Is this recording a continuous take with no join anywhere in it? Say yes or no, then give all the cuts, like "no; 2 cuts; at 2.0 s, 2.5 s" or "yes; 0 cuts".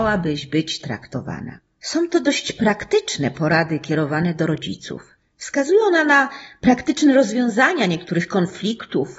yes; 0 cuts